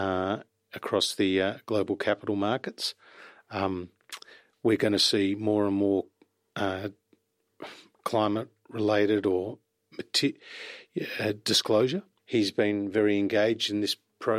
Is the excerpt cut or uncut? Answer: cut